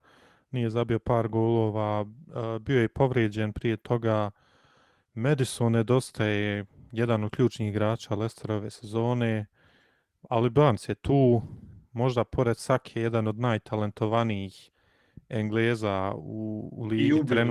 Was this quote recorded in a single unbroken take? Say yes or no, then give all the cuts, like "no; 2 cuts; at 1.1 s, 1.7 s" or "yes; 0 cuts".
yes; 0 cuts